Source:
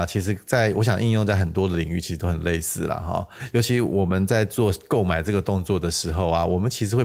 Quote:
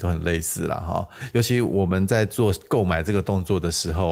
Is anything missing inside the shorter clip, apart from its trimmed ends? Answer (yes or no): no